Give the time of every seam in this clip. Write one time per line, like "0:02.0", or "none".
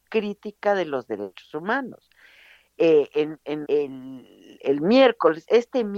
0:03.6